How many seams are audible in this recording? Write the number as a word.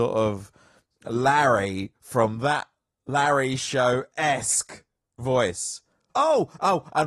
one